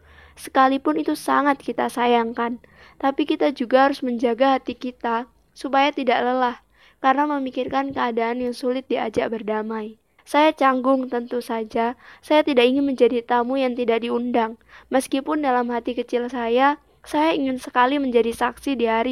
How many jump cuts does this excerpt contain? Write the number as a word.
one